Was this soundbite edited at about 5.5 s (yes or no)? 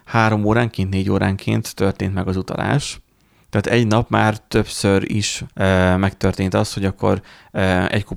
yes